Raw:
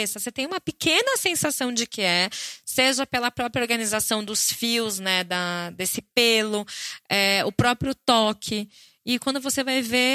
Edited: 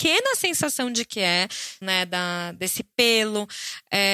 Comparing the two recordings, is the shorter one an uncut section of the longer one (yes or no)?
no